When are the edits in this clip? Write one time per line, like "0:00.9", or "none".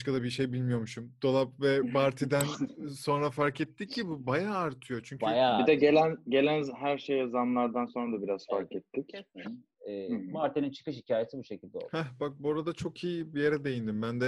0:09.4